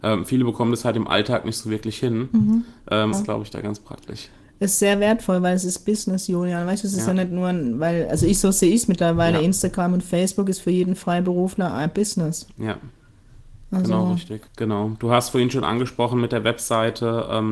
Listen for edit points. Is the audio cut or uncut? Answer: cut